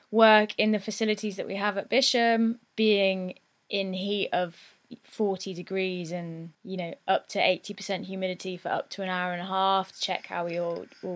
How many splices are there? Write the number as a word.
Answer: two